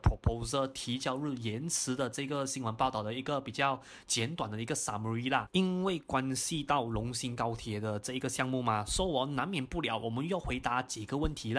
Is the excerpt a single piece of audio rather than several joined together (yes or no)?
no